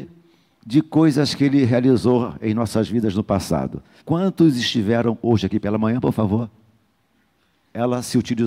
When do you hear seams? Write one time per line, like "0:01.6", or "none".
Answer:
0:04.0